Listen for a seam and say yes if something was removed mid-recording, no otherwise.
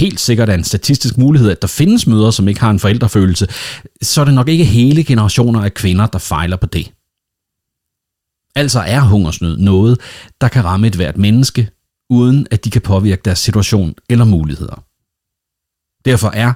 no